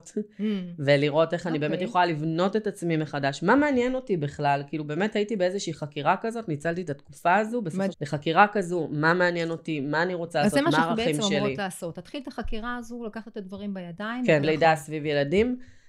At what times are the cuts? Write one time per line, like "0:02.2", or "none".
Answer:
0:07.9
0:14.4